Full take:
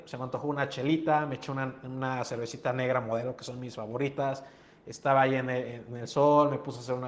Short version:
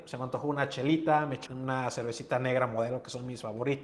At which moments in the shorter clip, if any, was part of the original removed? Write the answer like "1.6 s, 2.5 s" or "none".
1.5 s